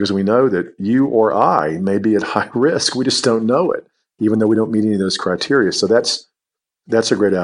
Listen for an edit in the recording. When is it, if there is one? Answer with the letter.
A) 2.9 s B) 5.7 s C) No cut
C